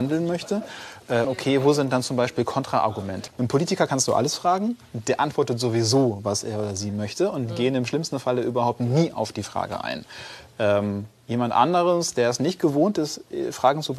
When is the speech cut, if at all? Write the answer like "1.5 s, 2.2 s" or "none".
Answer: 1.2 s, 3.3 s

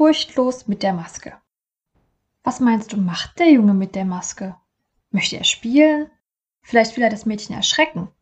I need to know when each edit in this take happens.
none

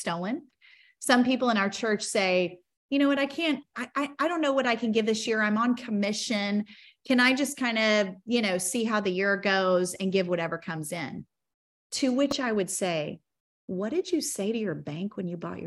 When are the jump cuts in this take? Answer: 3.7 s

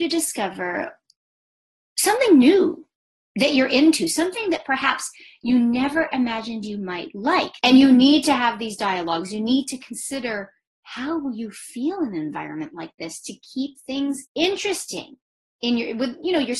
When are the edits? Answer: 7.6 s, 14.3 s

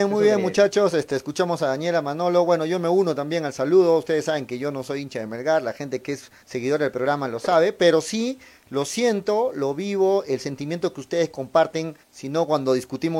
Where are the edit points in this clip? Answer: 6.4 s, 12.0 s

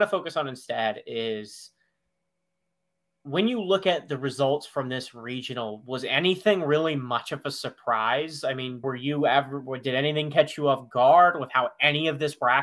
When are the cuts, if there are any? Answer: 8.8 s

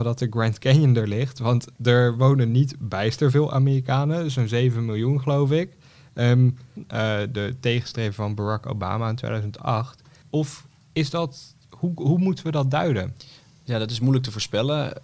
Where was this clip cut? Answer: 6.8 s, 10.2 s

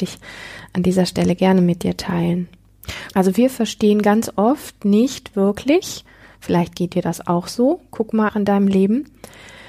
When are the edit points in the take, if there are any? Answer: 3.1 s, 8.3 s

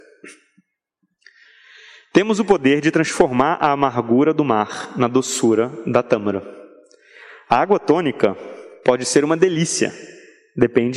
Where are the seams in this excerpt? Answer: none

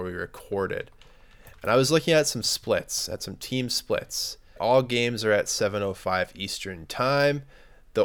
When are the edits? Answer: 4.6 s

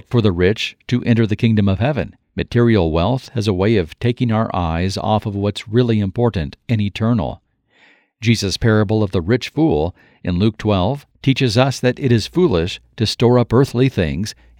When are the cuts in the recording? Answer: 2.2 s, 11.1 s

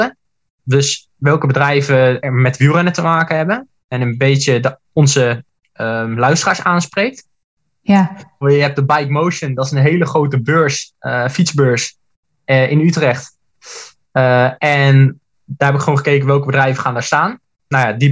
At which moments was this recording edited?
8.4 s

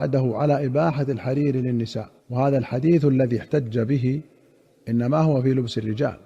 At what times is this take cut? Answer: 2.2 s

